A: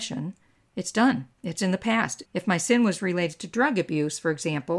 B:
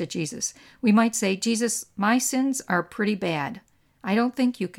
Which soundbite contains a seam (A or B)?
A